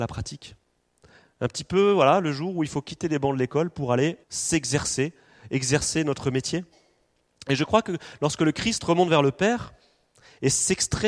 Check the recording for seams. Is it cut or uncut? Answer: cut